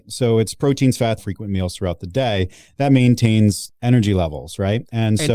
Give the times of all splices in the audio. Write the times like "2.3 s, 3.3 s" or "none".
1.2 s